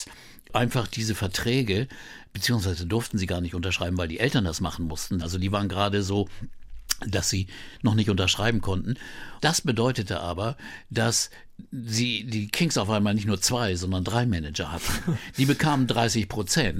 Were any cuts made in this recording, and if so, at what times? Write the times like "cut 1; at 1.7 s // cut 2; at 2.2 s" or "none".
cut 1; at 5.2 s // cut 2; at 9.4 s